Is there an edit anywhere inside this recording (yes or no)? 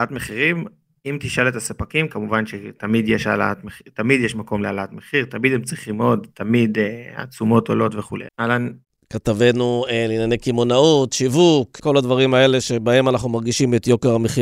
yes